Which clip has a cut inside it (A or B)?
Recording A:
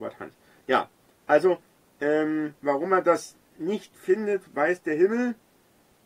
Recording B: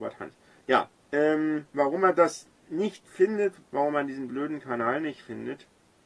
B